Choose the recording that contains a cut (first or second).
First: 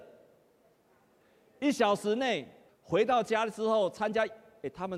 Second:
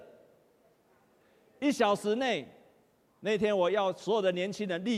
first